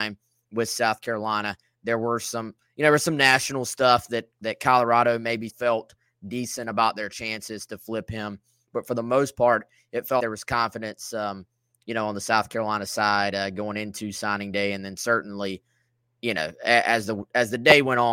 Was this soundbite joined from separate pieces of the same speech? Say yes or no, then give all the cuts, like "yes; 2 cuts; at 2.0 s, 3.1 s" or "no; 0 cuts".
yes; 2 cuts; at 5.5 s, 10.2 s